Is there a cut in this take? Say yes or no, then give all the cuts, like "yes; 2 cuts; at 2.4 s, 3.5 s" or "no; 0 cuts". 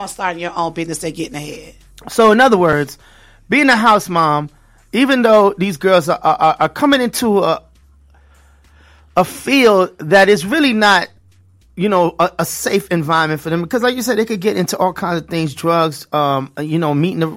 no; 0 cuts